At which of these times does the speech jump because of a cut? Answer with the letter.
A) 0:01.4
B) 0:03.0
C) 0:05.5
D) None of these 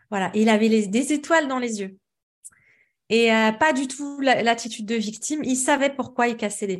D